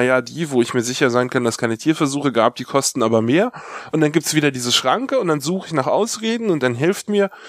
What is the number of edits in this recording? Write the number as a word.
zero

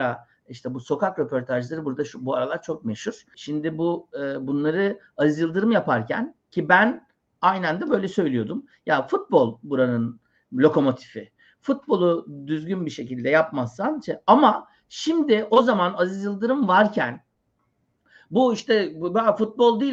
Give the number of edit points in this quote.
one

